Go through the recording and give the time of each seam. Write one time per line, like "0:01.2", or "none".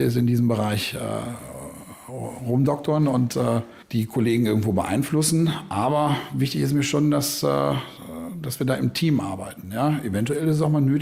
none

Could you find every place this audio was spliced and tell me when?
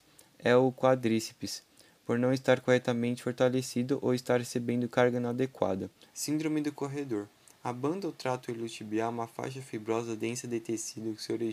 0:06.1

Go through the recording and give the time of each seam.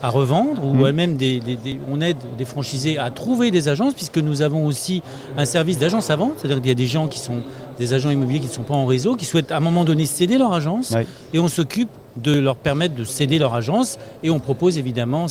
none

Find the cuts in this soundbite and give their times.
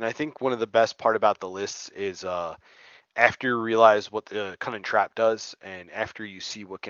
none

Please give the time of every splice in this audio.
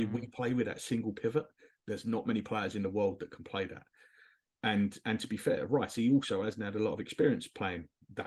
none

